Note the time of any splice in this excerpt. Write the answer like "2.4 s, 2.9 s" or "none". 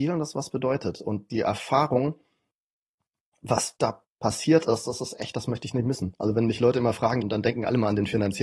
7.2 s